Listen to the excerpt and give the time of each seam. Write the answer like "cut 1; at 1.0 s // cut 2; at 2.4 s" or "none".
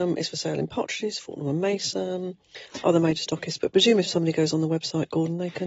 none